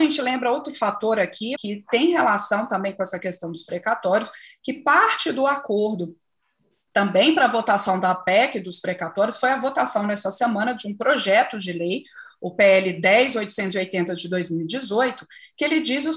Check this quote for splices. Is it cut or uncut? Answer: cut